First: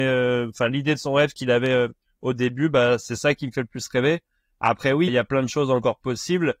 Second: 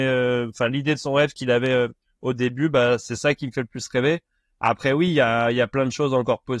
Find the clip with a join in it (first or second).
first